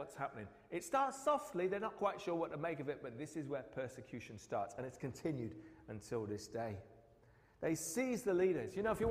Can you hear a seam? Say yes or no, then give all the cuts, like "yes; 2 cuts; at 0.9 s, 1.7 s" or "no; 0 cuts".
no; 0 cuts